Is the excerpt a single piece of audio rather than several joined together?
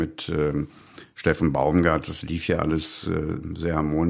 yes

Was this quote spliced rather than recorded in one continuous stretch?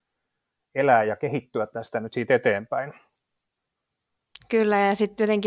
yes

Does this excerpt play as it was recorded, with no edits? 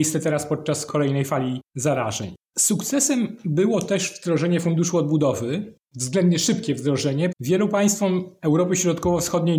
no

